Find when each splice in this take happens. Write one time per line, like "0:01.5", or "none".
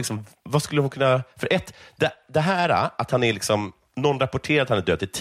none

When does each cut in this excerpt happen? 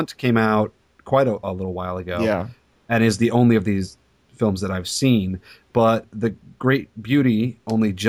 none

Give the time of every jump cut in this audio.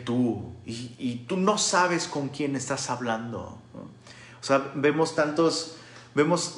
none

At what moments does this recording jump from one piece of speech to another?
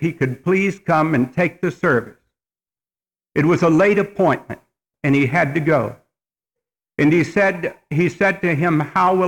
0:04.9

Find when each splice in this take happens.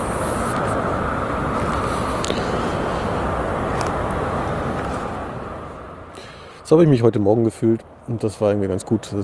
none

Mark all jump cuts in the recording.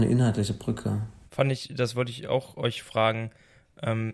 0:01.3

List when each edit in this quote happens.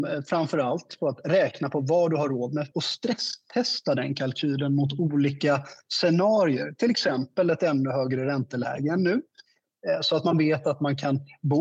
0:02.7

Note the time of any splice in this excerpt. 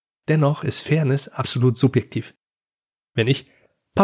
none

